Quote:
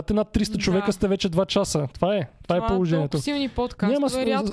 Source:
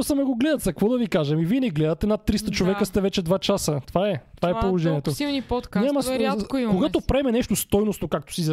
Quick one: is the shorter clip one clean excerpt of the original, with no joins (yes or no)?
yes